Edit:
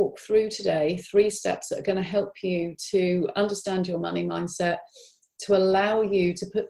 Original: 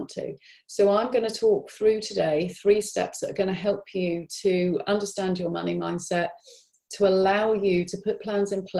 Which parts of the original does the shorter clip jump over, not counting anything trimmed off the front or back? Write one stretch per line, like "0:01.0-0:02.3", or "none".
none